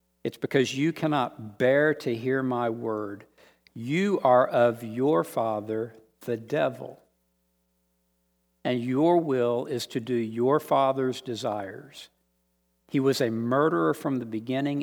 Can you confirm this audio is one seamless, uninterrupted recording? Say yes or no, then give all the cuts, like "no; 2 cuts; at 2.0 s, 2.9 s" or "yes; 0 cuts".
yes; 0 cuts